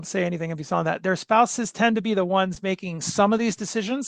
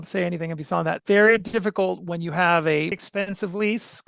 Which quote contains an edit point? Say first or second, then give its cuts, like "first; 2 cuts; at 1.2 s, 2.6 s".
second; 2 cuts; at 1.0 s, 2.9 s